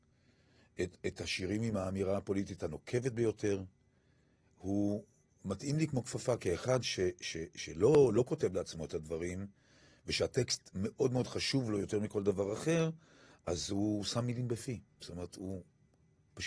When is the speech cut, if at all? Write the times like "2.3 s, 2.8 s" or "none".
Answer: none